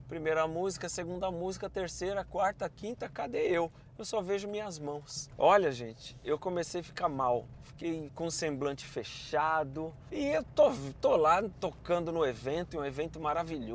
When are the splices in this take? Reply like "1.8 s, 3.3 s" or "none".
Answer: 8.1 s, 10.1 s